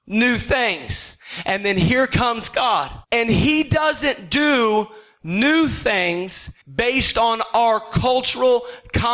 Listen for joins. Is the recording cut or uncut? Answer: cut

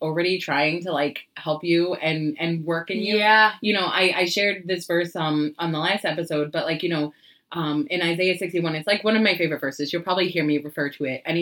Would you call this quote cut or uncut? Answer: uncut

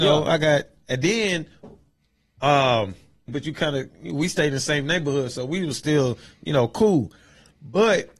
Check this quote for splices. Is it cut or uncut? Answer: cut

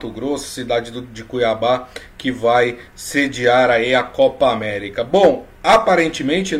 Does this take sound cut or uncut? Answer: uncut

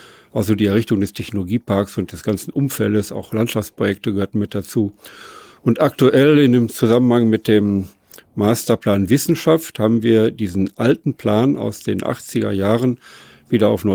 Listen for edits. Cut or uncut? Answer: uncut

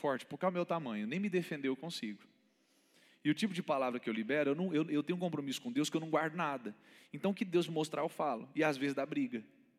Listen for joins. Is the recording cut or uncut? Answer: uncut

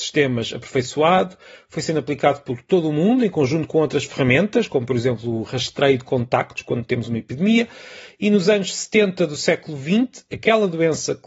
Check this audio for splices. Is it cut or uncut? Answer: uncut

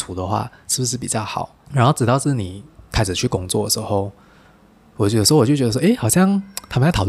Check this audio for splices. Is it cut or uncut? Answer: cut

